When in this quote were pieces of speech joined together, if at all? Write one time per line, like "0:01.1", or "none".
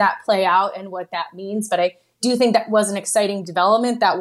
none